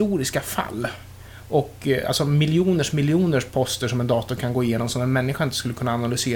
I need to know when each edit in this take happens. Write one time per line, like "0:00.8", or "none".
none